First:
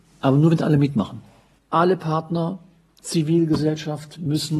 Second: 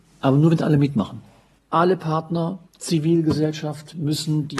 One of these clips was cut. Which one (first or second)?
second